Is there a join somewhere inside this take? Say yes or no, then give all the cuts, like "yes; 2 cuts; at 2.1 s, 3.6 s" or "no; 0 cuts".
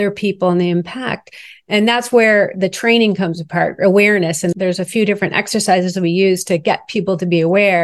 no; 0 cuts